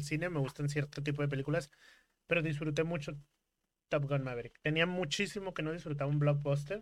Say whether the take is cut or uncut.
uncut